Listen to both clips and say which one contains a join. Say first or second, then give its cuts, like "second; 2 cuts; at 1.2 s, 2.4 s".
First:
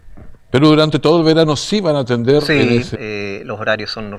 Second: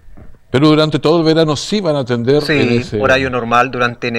first; 1 cut; at 2.9 s